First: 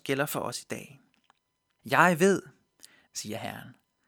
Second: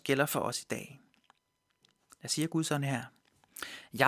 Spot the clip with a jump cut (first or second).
first